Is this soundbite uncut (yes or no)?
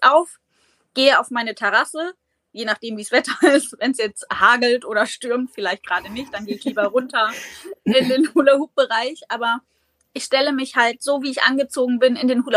yes